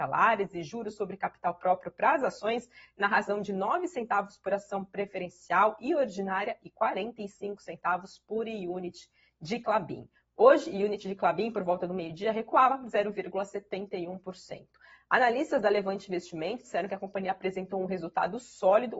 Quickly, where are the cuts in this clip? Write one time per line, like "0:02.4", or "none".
none